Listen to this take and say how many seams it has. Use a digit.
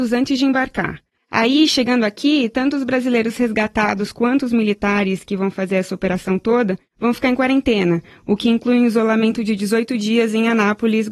1